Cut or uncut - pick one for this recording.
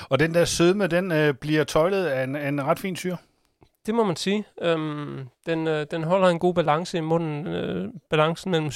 uncut